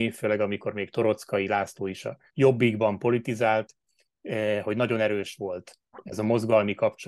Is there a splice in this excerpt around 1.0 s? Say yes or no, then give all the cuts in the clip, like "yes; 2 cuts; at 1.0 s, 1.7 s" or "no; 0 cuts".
no; 2 cuts; at 2.3 s, 4.6 s